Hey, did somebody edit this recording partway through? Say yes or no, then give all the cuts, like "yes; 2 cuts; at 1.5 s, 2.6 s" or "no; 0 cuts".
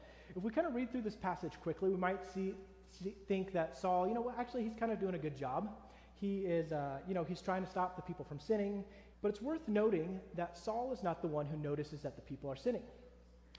yes; 1 cut; at 9.1 s